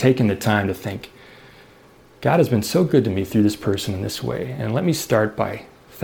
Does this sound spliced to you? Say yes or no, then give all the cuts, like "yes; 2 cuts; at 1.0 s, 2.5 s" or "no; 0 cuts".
no; 0 cuts